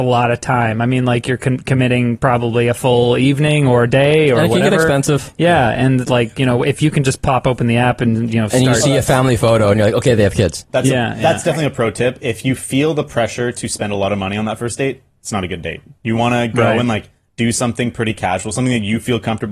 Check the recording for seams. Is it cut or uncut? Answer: uncut